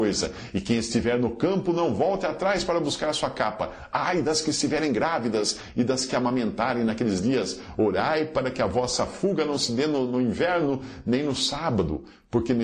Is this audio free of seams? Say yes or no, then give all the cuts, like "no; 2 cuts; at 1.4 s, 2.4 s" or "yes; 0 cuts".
yes; 0 cuts